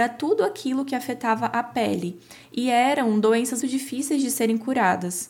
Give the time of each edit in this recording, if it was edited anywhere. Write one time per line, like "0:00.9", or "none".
0:03.6